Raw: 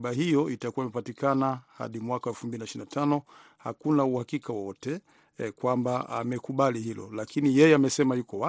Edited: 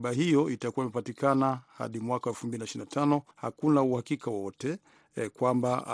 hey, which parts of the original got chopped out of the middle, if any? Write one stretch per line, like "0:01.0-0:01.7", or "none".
0:03.3-0:03.5